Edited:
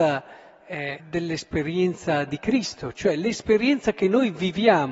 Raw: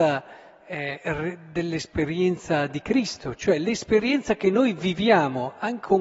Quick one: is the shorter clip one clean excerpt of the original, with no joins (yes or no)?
no